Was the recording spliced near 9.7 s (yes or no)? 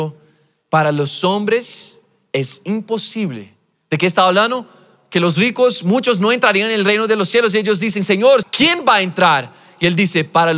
no